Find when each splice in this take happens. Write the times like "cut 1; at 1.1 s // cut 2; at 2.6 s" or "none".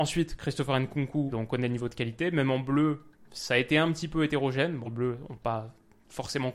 cut 1; at 4.8 s